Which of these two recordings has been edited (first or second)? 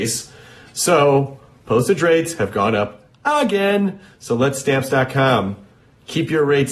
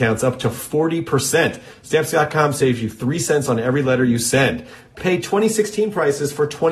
second